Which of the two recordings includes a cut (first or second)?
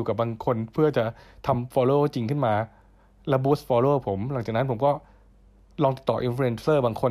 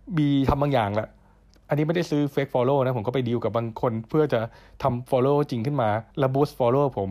second